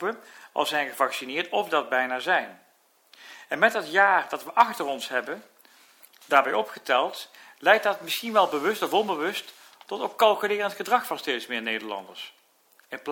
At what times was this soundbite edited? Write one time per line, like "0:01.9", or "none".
none